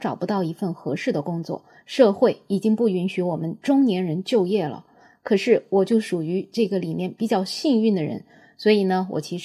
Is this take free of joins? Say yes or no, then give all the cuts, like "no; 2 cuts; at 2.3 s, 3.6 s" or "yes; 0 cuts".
yes; 0 cuts